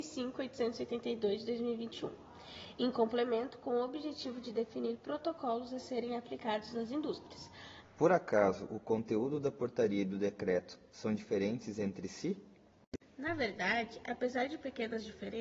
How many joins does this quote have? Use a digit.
1